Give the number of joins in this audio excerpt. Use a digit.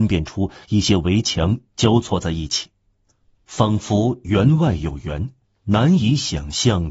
1